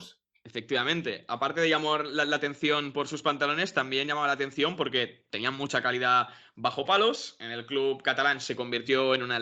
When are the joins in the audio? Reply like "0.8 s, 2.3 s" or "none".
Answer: none